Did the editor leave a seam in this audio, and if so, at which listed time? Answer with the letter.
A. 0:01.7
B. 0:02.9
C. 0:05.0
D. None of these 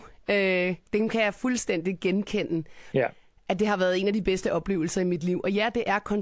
B